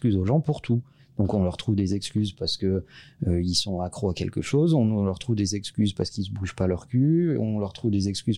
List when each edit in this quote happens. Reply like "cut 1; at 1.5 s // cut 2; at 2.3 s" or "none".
none